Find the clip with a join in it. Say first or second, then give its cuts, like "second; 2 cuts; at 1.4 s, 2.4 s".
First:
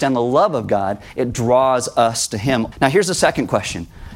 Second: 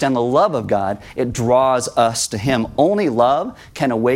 first; 1 cut; at 2.7 s